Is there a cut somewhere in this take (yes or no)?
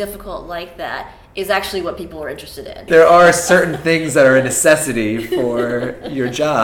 yes